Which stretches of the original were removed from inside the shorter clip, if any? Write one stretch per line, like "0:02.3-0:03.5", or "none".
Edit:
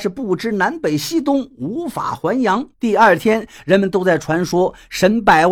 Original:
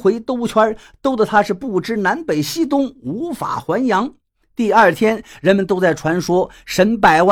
0:04.2-0:04.5